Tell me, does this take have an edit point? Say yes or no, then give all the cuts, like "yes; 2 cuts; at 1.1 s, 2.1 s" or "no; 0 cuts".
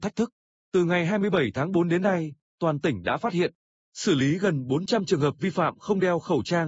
no; 0 cuts